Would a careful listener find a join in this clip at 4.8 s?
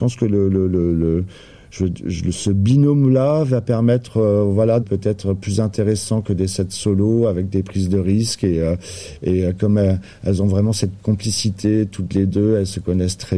yes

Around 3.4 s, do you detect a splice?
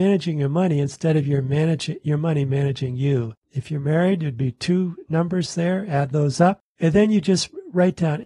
yes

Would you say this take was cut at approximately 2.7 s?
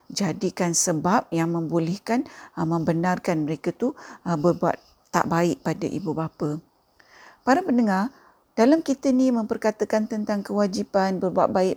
no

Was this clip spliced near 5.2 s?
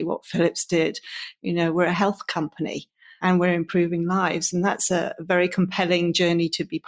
no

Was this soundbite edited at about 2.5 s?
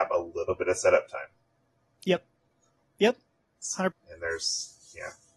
yes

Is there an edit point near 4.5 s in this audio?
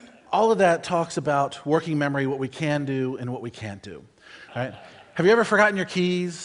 yes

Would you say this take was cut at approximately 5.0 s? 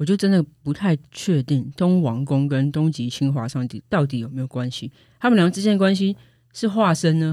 no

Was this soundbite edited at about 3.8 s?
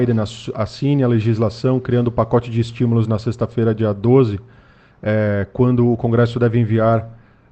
no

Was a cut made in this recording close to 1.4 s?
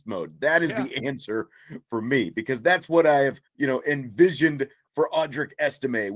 no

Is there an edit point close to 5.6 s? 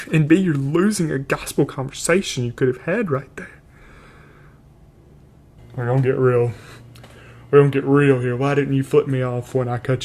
yes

